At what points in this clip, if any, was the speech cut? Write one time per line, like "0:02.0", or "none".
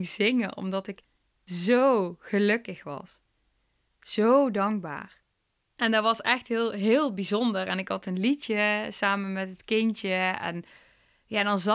none